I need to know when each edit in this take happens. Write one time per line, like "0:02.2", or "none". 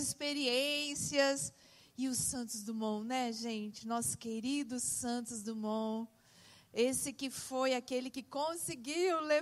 none